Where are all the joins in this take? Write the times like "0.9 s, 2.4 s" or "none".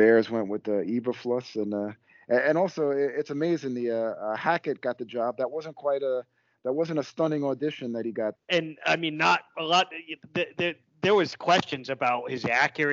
8.4 s